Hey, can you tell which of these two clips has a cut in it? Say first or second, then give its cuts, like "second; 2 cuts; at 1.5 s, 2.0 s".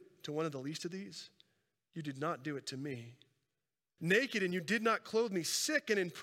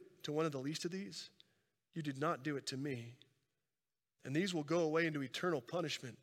first; 1 cut; at 4.0 s